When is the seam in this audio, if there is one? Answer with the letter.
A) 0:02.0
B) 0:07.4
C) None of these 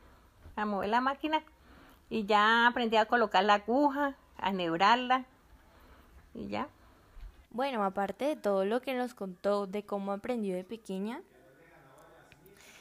B